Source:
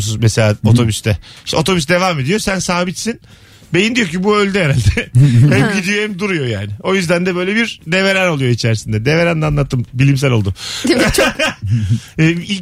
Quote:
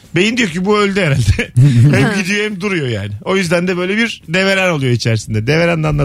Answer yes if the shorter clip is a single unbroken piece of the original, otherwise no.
yes